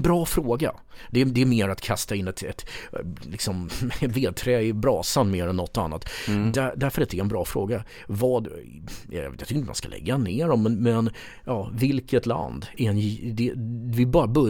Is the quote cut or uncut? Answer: uncut